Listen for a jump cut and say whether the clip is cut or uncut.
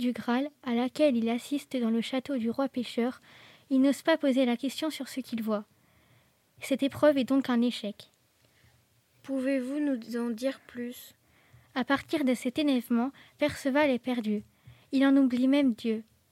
uncut